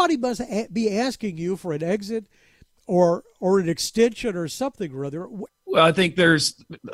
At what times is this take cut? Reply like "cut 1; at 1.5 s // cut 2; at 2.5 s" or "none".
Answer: cut 1; at 5.5 s